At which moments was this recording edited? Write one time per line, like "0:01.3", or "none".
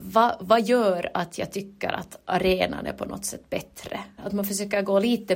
0:04.2

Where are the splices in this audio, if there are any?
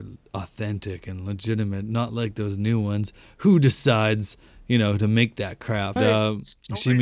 0:06.0

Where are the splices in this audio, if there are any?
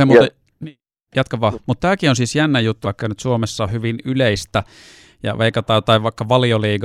0:01.5
0:02.8

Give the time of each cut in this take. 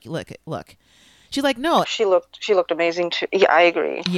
0:01.8

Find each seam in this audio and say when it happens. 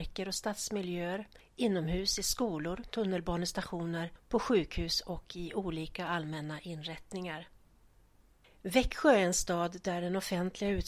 0:02.9

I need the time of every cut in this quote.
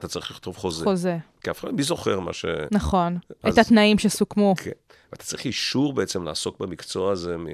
none

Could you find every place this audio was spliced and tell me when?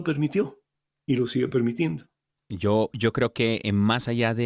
0:02.4

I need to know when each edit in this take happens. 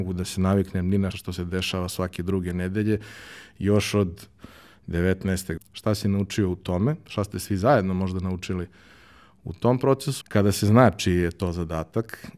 0:01.1
0:05.6
0:10.2

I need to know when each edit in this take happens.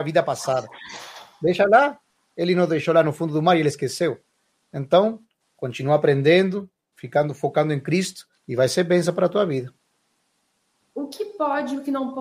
0:05.5
0:08.4
0:10.8

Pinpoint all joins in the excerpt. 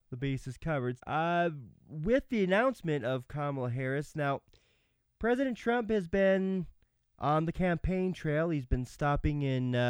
0:01.0

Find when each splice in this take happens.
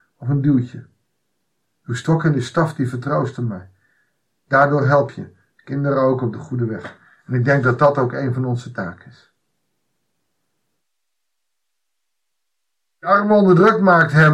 none

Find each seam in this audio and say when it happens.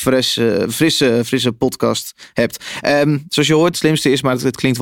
0:03.7

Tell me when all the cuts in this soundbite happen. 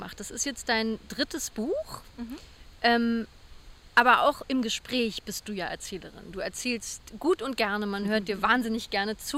none

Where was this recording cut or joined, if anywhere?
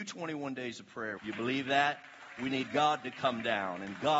0:01.2

